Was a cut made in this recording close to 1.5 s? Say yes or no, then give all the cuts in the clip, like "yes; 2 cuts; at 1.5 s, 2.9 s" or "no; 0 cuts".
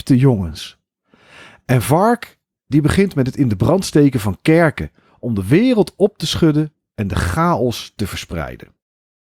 no; 0 cuts